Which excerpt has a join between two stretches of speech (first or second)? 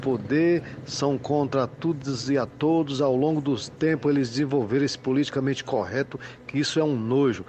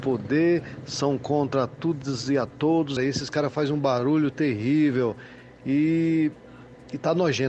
second